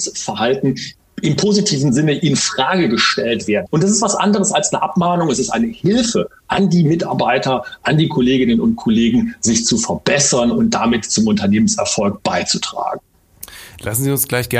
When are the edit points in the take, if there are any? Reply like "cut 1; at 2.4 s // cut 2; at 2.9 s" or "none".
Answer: cut 1; at 3.7 s

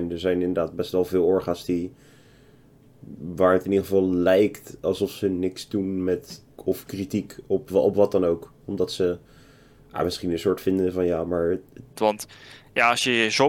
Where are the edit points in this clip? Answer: cut 1; at 6.6 s // cut 2; at 12.0 s

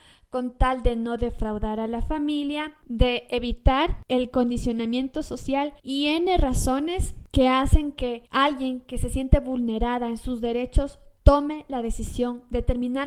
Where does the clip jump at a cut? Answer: cut 1; at 5.8 s

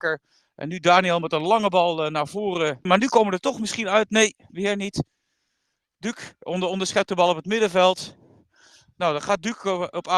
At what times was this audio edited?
cut 1; at 2.9 s

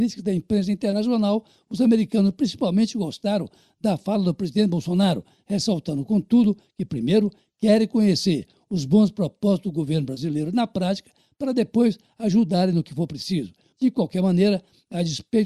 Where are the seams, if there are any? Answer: cut 1; at 13.7 s

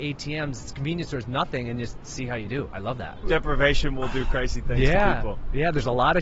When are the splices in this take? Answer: cut 1; at 3.2 s

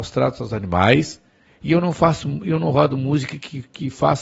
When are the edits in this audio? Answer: cut 1; at 1.4 s

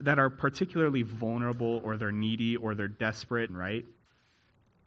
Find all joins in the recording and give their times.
cut 1; at 3.5 s

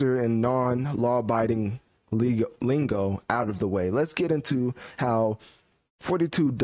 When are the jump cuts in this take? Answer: none

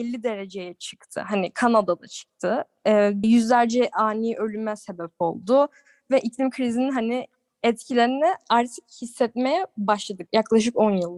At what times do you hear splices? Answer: cut 1; at 3.2 s // cut 2; at 10.3 s

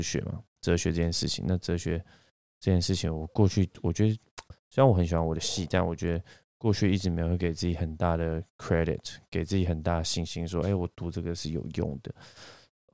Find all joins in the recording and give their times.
none

